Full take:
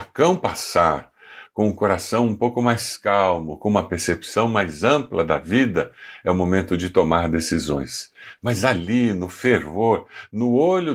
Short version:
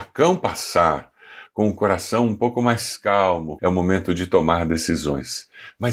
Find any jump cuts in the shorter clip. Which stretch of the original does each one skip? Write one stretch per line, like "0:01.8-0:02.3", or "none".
0:03.6-0:06.2